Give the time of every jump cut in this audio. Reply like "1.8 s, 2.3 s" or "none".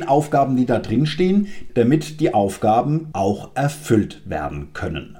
1.7 s, 3.1 s